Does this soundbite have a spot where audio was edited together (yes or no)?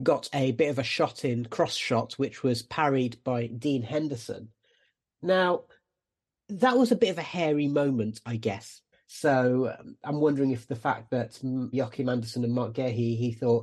yes